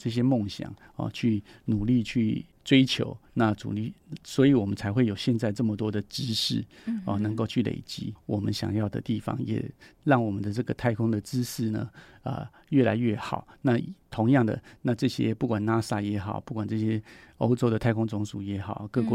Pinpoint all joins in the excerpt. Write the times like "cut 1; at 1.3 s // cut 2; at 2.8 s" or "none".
cut 1; at 8.2 s